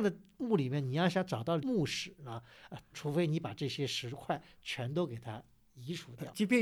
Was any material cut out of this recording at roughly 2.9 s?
yes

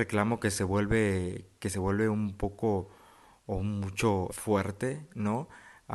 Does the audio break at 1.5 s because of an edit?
no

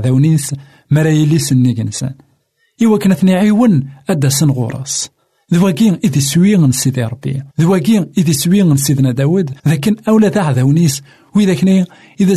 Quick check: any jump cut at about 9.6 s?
yes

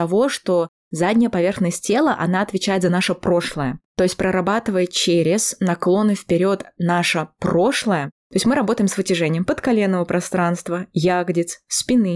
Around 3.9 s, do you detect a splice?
yes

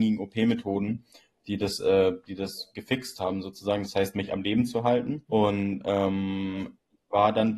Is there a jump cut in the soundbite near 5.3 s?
yes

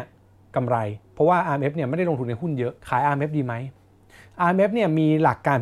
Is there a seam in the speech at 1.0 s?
yes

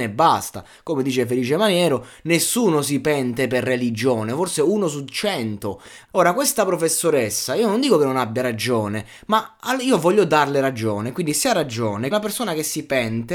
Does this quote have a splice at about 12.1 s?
yes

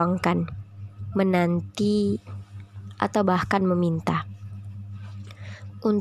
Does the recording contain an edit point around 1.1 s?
yes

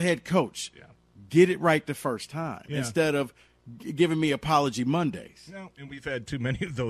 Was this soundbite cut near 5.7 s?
yes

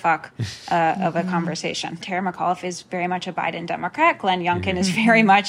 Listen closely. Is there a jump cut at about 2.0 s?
yes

